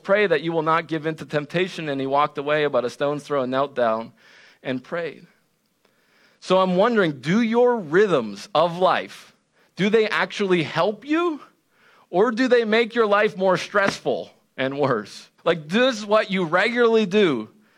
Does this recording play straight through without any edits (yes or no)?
no